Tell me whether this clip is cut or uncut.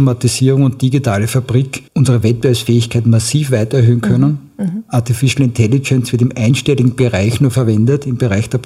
cut